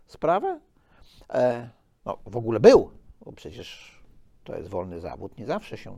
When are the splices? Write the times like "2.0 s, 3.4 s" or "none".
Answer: none